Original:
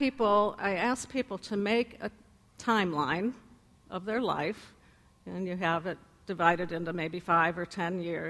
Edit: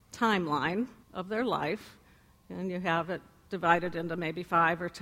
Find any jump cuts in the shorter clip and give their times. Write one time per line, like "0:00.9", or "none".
0:01.0